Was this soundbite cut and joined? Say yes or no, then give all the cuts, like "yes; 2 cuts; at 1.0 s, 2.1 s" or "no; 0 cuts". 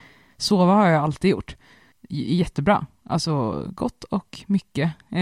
no; 0 cuts